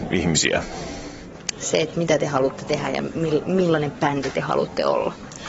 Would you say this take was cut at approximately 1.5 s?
yes; 1 cut; at 1.5 s

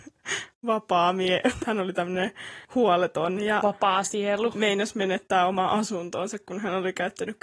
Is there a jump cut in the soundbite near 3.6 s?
no; 1 cut; at 1.6 s

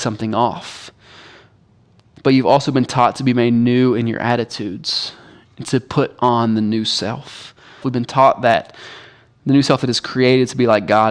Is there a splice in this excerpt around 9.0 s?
no; 1 cut; at 7.8 s

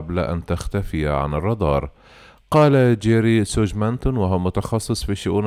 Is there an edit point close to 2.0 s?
no; 0 cuts

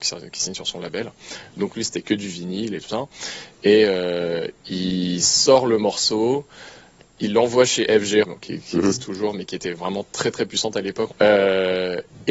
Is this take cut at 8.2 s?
yes; 2 cuts; at 8.2 s, 11.1 s

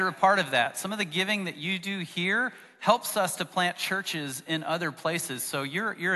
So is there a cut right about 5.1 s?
no; 0 cuts

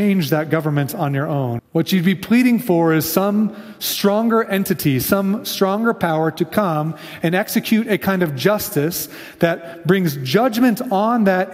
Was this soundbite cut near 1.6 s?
yes; 1 cut; at 1.6 s

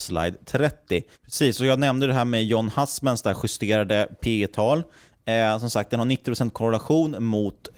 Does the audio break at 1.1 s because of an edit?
yes; 1 cut; at 1.1 s

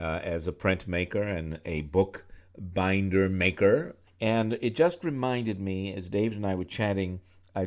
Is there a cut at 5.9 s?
no; 1 cut; at 4.1 s

